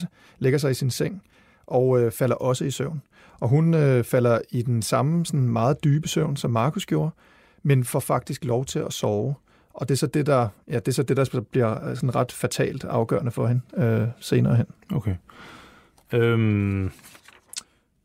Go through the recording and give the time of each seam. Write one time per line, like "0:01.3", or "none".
none